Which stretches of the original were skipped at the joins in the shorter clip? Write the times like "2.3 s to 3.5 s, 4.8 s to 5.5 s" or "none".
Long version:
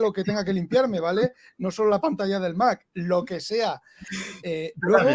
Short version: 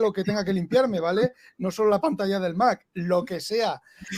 none